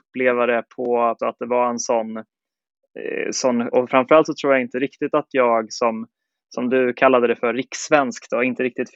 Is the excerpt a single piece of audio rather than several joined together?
no; 2 cuts; at 1.2 s, 3.7 s

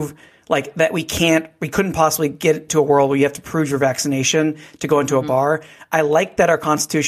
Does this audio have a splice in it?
no; 0 cuts

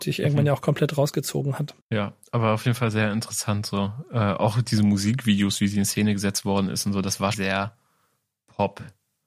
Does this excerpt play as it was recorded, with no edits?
no; 2 cuts; at 1.8 s, 7.3 s

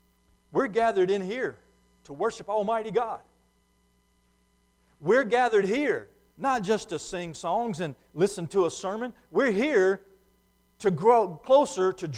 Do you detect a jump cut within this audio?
no; 0 cuts

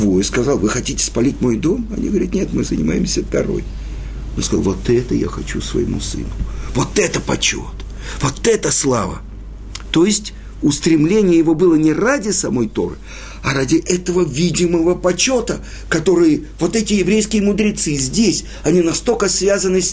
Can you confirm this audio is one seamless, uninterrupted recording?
yes; 0 cuts

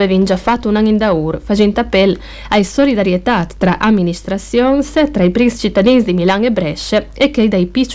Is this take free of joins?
yes; 0 cuts

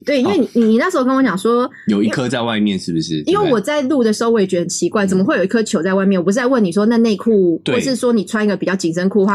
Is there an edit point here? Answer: no; 0 cuts

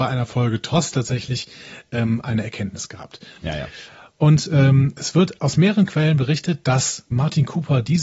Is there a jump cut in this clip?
yes; 2 cuts; at 3.4 s, 7.1 s

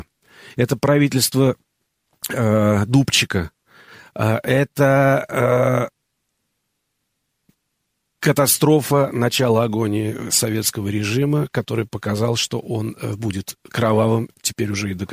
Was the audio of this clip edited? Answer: no; 0 cuts

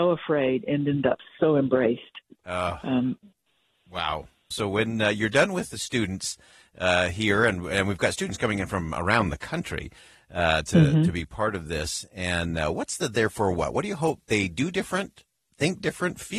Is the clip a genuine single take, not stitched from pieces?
no; 1 cut; at 4.5 s

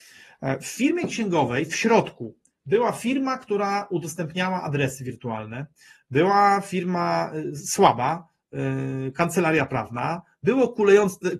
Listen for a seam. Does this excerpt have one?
no; 0 cuts

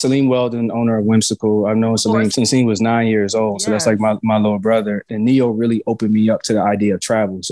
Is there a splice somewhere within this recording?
yes; 1 cut; at 5.1 s

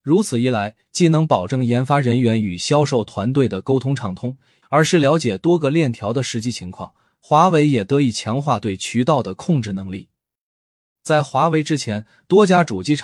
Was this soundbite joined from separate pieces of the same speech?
yes; 1 cut; at 4.6 s

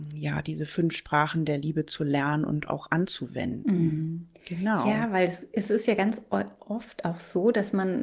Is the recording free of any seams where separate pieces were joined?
yes; 0 cuts

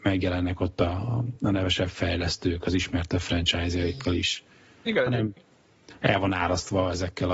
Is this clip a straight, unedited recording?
yes; 0 cuts

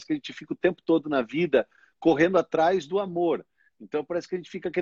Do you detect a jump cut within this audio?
no; 0 cuts

